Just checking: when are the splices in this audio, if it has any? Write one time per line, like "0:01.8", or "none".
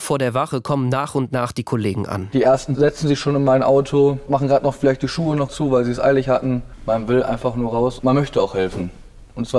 none